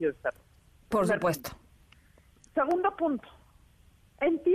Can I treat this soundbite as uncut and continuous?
yes; 0 cuts

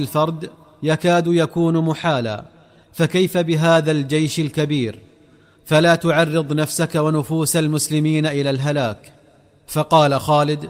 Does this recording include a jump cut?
no; 0 cuts

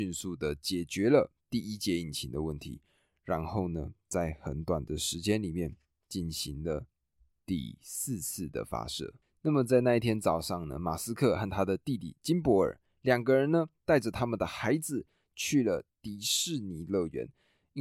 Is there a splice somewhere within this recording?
yes; 1 cut; at 9.3 s

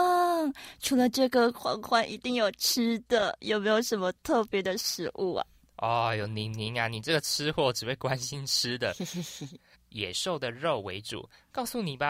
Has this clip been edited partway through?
yes; 1 cut; at 9.7 s

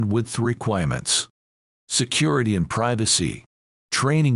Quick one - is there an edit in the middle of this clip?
no; 0 cuts

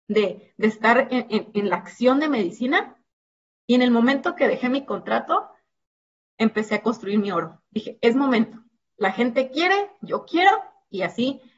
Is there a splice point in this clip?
no; 0 cuts

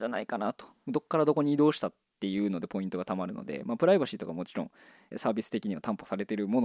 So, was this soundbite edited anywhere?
yes; 1 cut; at 5.1 s

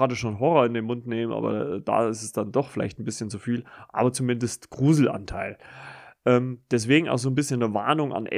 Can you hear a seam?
no; 0 cuts

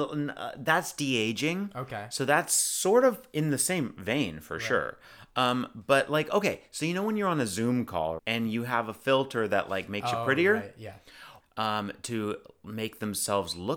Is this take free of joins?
no; 2 cuts; at 8.2 s, 11.4 s

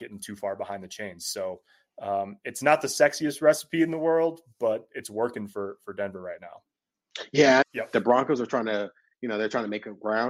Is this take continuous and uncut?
no; 1 cut; at 7.6 s

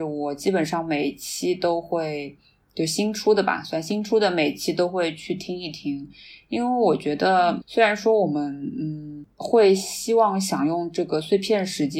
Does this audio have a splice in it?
yes; 1 cut; at 7.6 s

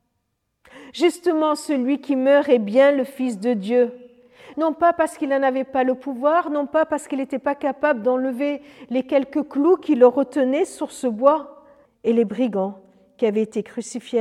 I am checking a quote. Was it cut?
yes; 2 cuts; at 4.5 s, 11.9 s

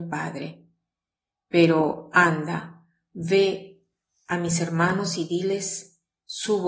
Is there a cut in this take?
no; 0 cuts

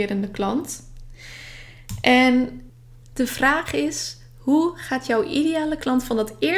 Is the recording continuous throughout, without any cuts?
yes; 0 cuts

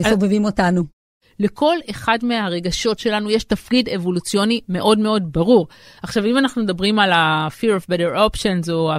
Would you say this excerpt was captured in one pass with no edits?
yes; 0 cuts

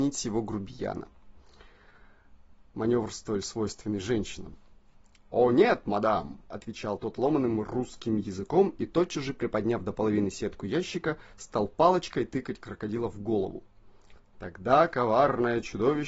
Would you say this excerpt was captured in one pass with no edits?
yes; 0 cuts

